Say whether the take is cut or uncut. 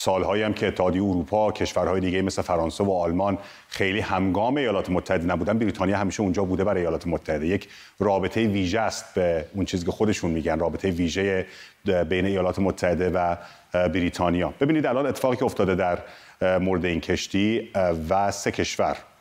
uncut